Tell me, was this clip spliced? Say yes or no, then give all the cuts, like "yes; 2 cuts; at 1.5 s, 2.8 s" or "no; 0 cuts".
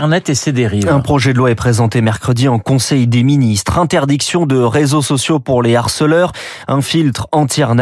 no; 0 cuts